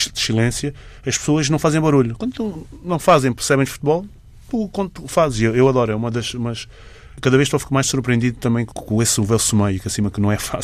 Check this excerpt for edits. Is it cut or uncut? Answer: uncut